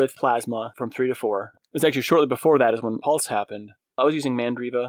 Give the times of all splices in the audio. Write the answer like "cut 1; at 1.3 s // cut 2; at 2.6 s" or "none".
cut 1; at 1.5 s